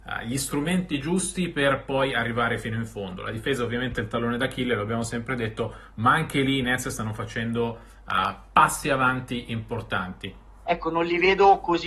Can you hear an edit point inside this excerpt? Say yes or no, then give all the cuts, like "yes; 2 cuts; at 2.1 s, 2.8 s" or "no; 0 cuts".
yes; 1 cut; at 10.6 s